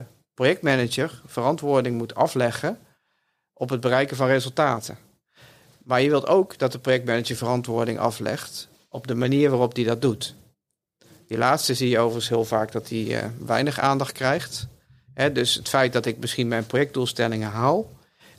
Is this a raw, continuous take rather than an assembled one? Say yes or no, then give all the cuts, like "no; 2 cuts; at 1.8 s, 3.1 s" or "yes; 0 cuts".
yes; 0 cuts